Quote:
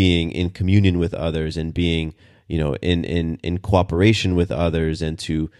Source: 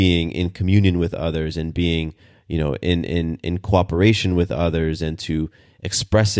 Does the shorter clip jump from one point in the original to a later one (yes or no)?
no